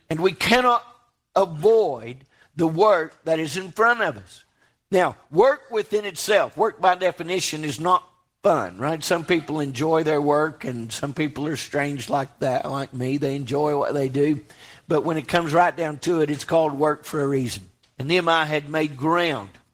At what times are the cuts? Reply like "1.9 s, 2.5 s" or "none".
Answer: 17.8 s